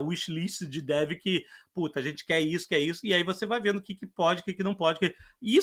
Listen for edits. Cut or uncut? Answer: uncut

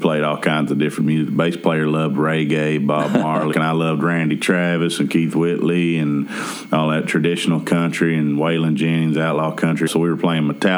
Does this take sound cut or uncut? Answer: cut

